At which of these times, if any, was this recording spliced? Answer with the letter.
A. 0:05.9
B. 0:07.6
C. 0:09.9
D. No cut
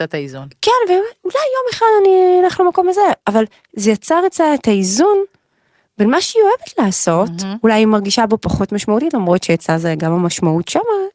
D